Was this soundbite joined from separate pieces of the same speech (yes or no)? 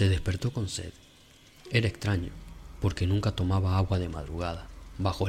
no